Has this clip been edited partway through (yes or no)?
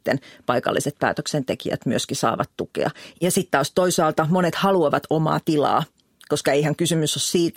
yes